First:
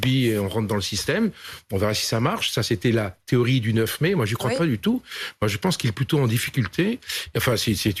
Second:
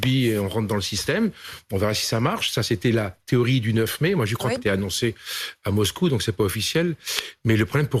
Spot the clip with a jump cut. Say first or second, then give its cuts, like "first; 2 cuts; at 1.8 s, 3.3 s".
second; 1 cut; at 4.6 s